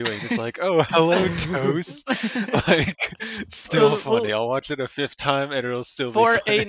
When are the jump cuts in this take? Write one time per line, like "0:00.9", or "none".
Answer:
none